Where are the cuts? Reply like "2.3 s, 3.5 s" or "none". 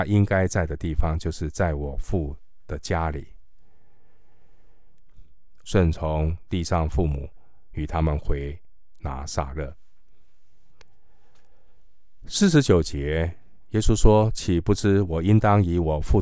5.6 s